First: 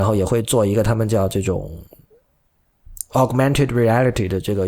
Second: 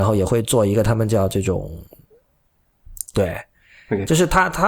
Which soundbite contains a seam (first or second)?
second